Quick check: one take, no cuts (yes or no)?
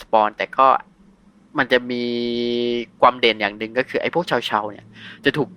yes